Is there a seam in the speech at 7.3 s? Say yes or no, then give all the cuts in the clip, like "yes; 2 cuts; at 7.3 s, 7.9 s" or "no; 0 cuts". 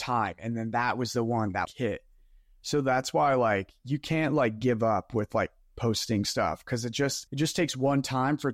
yes; 2 cuts; at 1.6 s, 7.3 s